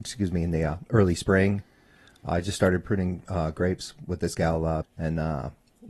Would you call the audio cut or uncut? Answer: cut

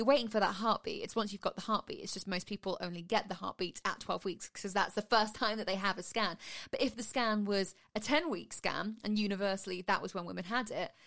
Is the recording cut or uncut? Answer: uncut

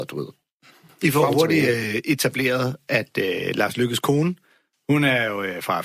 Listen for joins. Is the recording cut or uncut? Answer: uncut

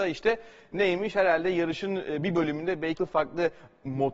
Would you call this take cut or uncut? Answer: cut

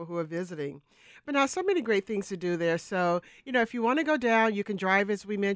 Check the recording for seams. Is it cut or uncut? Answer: uncut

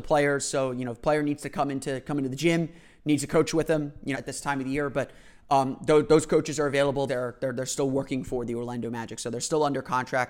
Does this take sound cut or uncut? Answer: cut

